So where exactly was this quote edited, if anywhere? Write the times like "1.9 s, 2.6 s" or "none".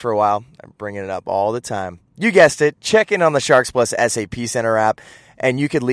2.1 s

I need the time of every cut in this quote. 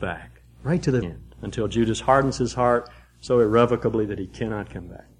1.0 s

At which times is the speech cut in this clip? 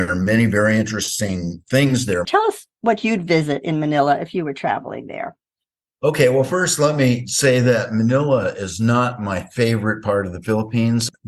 2.2 s

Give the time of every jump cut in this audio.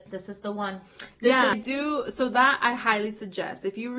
1.5 s

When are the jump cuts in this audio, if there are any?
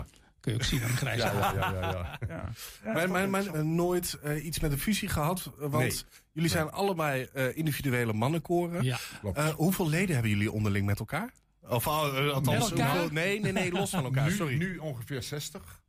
3.5 s

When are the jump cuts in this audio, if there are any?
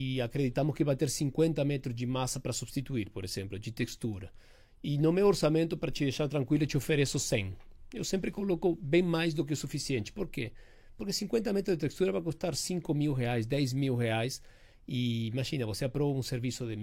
none

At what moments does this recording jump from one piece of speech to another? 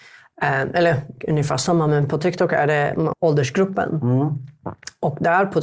3.1 s

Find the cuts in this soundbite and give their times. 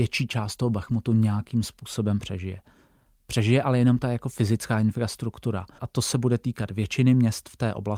5.8 s

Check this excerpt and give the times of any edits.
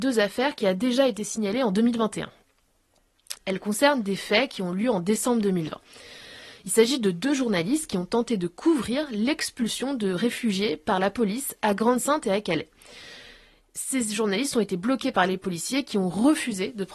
3.4 s

